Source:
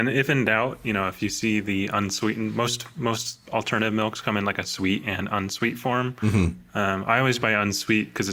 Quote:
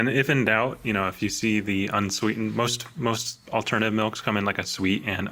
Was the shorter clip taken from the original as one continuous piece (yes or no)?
yes